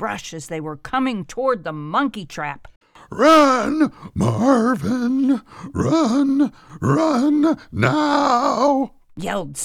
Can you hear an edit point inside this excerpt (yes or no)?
no